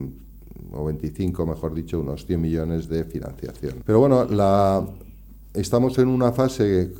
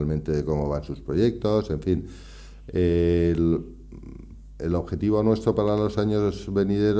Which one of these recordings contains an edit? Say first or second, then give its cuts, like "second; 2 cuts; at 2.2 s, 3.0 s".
first; 1 cut; at 3.8 s